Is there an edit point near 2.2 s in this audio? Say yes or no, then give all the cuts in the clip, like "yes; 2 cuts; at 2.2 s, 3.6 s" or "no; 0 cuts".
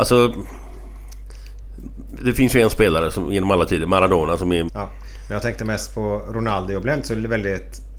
no; 1 cut; at 4.7 s